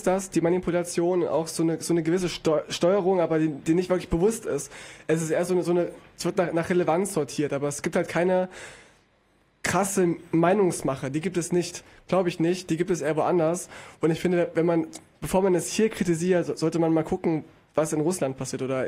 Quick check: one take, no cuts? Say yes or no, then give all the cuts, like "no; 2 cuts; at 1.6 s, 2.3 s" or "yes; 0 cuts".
yes; 0 cuts